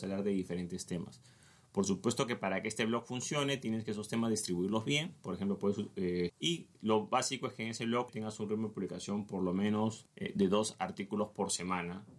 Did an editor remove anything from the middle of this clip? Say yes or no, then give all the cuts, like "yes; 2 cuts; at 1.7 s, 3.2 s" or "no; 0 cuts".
yes; 2 cuts; at 6.3 s, 8.1 s